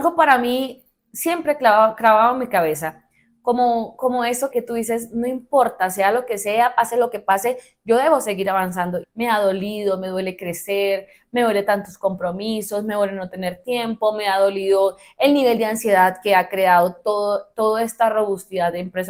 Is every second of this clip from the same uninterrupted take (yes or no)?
no